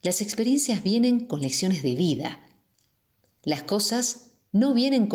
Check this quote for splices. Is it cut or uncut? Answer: uncut